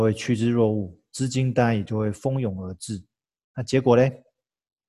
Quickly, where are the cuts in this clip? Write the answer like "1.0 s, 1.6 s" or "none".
none